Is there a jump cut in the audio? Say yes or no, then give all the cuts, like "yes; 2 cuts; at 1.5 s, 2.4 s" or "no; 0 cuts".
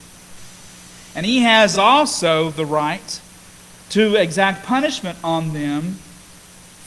no; 0 cuts